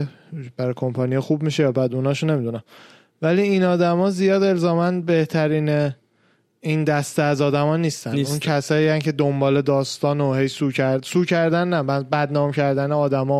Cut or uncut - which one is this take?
uncut